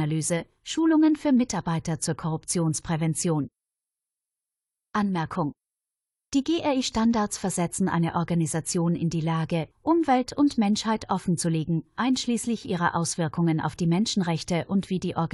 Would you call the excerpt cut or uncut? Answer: cut